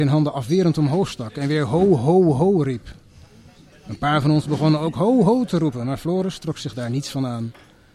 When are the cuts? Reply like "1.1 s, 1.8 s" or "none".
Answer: 5.2 s